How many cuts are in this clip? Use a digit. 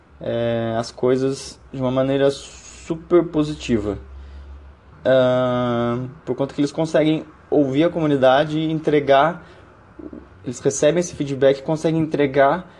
3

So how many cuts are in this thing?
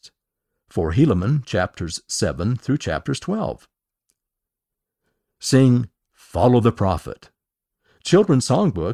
0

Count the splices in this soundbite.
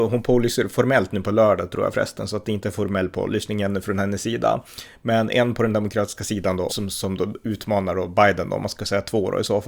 1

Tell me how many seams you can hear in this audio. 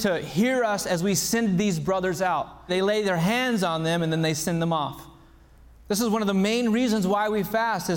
2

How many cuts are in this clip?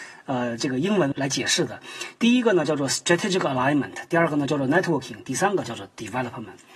1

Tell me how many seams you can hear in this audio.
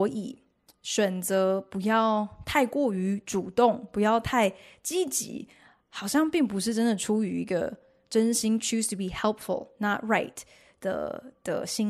0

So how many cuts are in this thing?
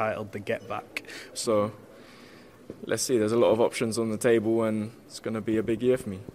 1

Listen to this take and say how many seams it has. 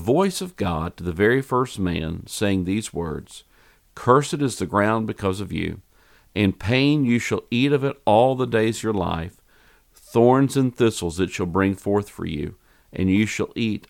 0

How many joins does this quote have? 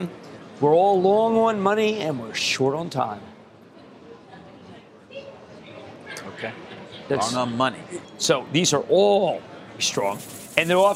2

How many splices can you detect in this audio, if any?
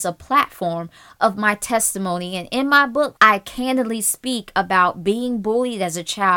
1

